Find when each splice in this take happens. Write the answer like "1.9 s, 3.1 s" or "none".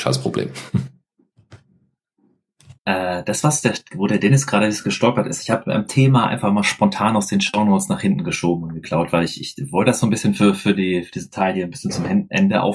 2.8 s